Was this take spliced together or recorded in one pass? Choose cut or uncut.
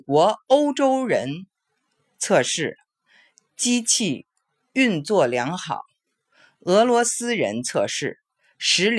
uncut